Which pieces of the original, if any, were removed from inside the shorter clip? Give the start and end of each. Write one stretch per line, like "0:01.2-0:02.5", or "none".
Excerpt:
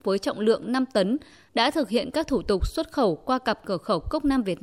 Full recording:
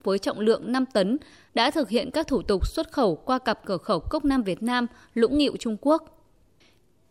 none